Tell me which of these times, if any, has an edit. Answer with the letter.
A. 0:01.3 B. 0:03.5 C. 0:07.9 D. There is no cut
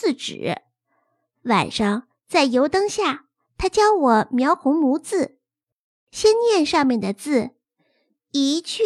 D